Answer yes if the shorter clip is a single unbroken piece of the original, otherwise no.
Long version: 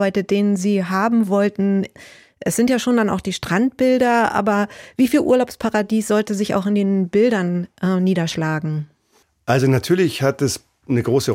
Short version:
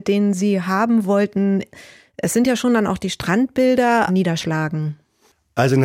no